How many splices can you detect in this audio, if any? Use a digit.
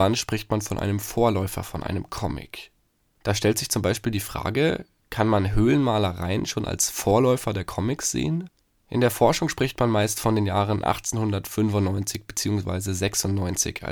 0